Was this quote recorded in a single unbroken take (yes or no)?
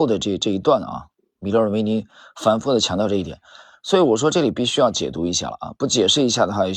yes